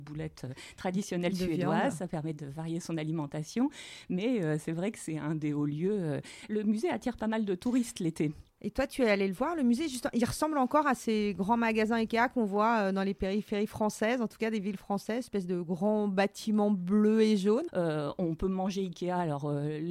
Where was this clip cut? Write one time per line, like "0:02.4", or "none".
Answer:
0:17.7